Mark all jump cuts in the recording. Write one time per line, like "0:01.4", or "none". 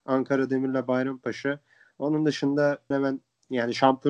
0:02.9